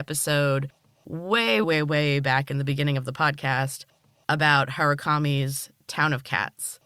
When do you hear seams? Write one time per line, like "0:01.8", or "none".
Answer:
0:01.6